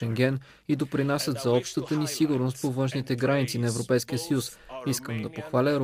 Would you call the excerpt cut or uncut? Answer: uncut